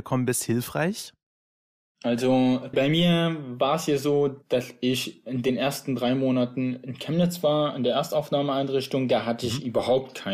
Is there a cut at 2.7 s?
yes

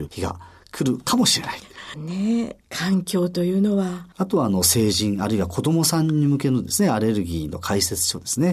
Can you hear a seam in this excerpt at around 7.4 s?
no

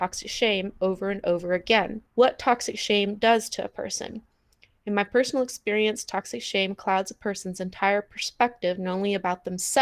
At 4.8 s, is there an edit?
no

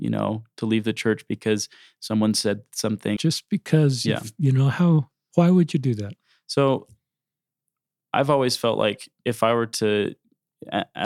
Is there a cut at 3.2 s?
yes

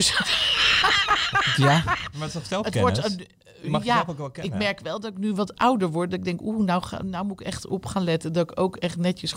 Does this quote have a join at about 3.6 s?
no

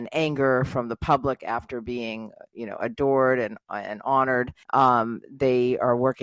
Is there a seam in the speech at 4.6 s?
yes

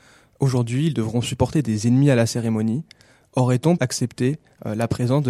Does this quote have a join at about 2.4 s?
no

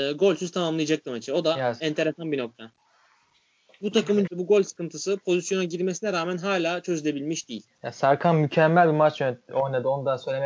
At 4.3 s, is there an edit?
yes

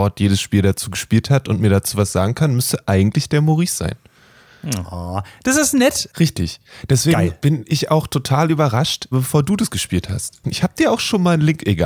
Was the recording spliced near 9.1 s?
yes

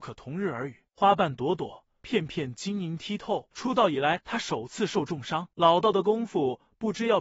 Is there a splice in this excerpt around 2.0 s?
no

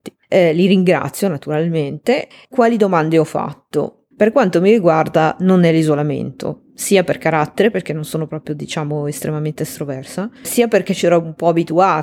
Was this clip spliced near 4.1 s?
yes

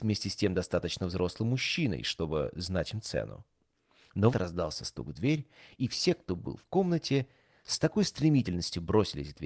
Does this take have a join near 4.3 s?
yes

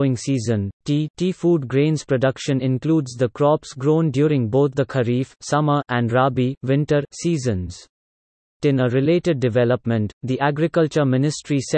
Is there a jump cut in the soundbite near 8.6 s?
yes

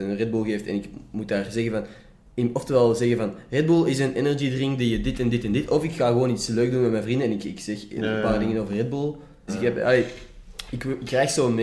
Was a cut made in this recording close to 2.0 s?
no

